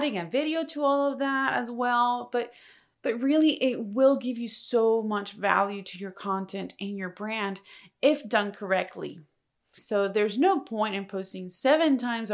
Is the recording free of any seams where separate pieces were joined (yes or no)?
no